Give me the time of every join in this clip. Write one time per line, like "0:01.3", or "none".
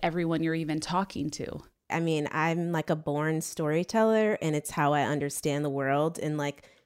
0:01.9